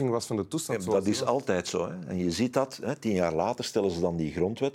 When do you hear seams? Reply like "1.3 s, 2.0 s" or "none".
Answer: none